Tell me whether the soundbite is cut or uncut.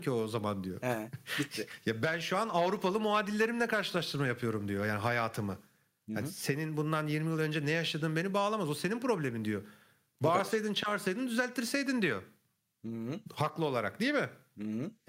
uncut